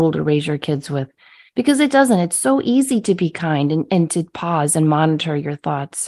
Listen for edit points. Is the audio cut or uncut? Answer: uncut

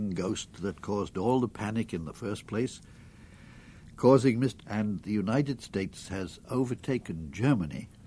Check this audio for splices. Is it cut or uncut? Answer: cut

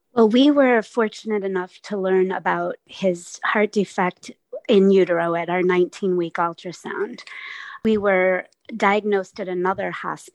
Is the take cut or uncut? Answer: uncut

